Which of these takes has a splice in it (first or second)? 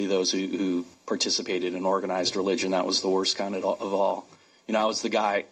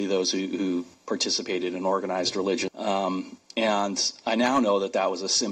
second